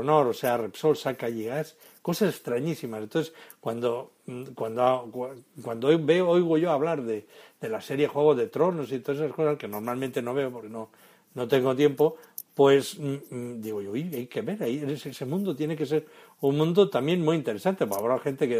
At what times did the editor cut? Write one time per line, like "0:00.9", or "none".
none